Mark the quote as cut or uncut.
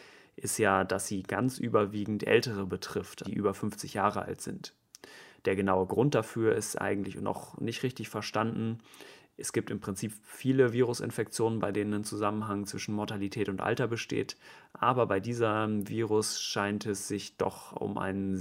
cut